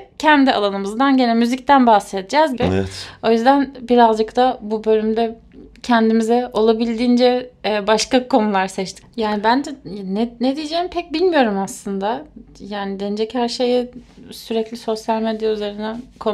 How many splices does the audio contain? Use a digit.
2